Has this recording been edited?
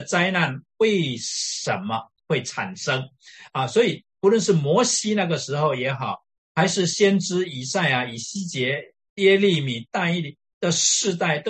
no; 0 cuts

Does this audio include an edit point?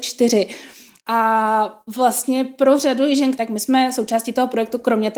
yes; 2 cuts; at 1.0 s, 3.3 s

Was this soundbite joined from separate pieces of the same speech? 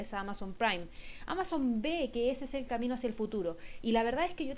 no; 0 cuts

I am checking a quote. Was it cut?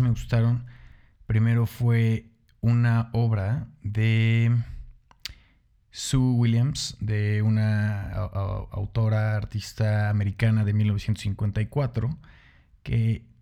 no; 0 cuts

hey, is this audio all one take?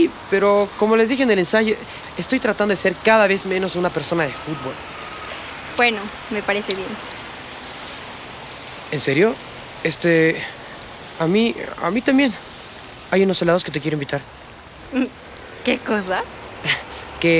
no; 1 cut; at 6.2 s

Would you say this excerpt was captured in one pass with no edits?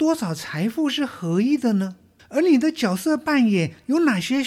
no; 1 cut; at 2.2 s

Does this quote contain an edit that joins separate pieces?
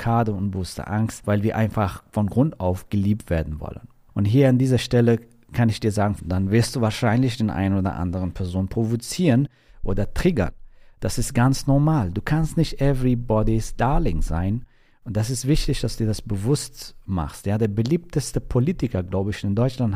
yes; 1 cut; at 6.2 s

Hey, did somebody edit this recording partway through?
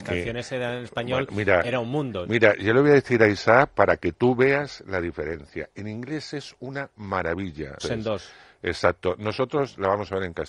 yes; 1 cut; at 7.8 s

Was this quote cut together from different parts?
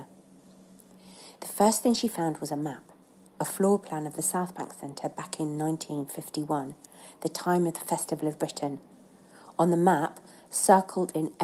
no; 0 cuts

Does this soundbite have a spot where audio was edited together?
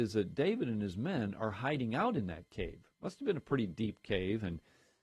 no; 0 cuts

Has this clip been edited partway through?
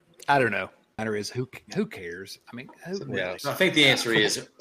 yes; 2 cuts; at 1.0 s, 3.4 s

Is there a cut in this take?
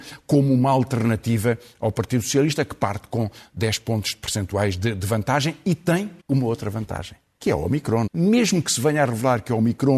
yes; 2 cuts; at 6.2 s, 8.1 s

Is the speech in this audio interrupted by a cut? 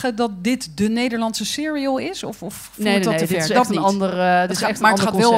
no; 0 cuts

